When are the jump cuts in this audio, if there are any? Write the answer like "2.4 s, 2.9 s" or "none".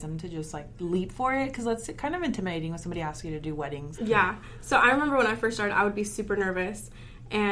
3.9 s